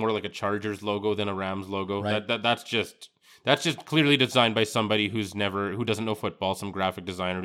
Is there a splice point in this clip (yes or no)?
no